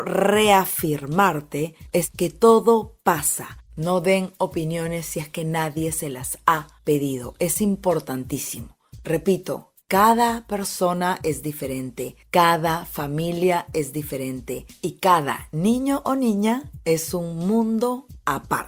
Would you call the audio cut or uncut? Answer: cut